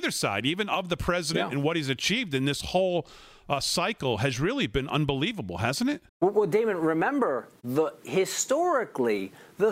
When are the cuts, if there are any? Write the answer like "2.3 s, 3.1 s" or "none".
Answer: 6.1 s